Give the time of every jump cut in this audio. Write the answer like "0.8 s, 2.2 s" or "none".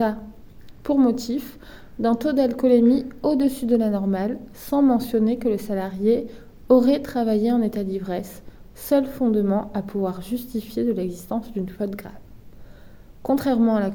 none